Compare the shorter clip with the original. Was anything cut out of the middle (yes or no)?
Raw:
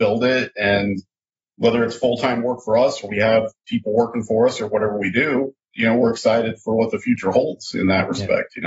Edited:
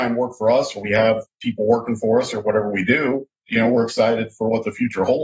no